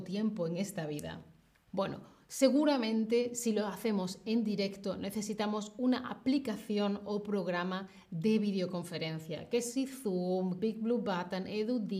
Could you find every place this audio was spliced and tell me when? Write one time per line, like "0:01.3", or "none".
0:01.7
0:10.6